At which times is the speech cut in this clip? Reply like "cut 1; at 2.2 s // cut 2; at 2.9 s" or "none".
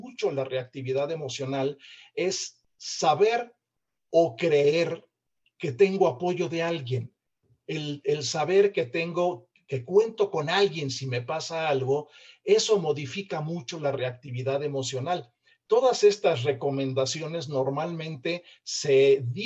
none